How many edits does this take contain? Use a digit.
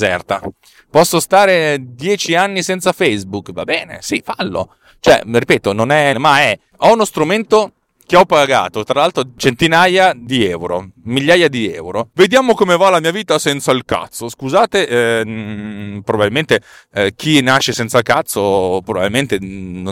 2